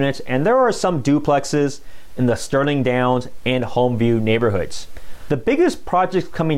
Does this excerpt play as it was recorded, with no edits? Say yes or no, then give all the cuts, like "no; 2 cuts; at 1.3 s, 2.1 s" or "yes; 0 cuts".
no; 1 cut; at 5.3 s